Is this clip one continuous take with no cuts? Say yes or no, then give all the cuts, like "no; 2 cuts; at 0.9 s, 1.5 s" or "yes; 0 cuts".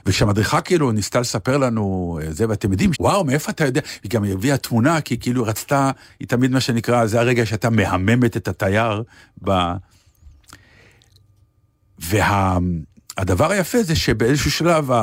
no; 1 cut; at 2.9 s